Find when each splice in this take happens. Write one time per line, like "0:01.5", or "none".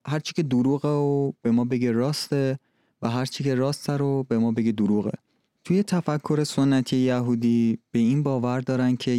0:05.5

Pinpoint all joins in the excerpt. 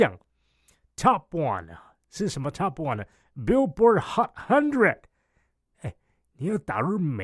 none

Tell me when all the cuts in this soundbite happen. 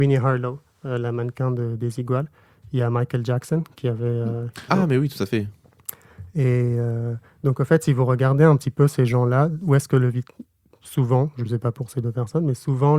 0:04.7

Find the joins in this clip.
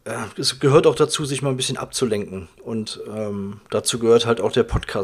none

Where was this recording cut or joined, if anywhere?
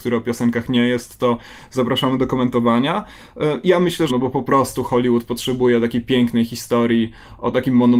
0:04.1

